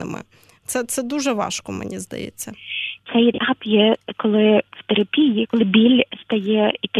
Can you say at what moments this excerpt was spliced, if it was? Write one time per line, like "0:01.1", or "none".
0:03.0
0:05.5

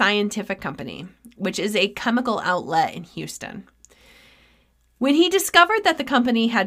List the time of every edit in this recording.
none

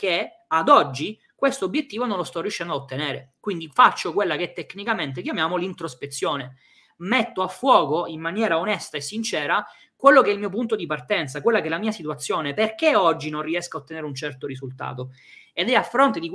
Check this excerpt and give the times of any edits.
none

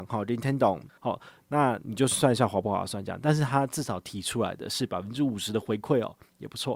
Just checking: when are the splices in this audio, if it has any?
0:01.0

